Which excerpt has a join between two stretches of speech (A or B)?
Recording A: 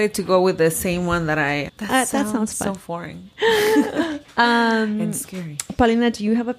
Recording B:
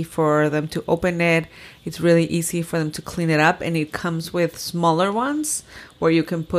A